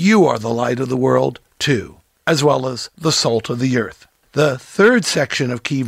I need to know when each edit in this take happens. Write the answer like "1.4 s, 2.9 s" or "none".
none